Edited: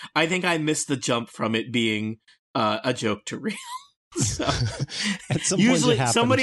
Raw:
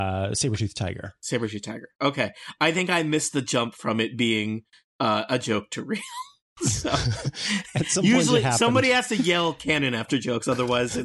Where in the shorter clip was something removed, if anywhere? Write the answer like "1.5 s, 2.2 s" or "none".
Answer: none